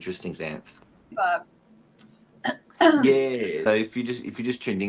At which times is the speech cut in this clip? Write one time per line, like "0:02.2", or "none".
0:01.1
0:03.7